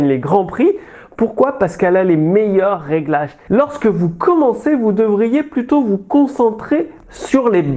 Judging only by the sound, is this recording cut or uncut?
cut